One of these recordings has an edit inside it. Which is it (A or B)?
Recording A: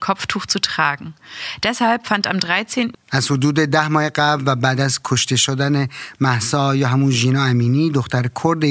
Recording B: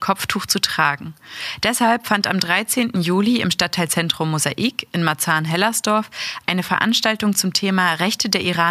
A